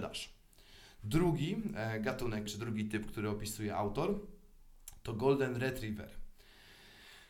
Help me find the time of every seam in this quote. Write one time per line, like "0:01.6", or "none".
0:02.5